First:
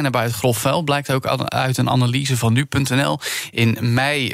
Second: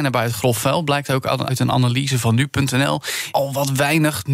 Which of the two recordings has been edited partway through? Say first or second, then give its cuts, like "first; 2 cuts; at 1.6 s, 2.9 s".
second; 2 cuts; at 1.5 s, 3.3 s